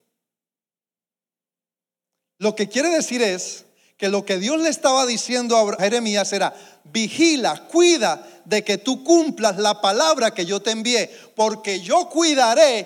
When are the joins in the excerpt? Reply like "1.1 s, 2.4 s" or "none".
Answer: 5.8 s